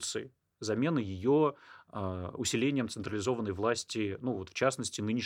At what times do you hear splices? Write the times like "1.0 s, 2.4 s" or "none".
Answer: none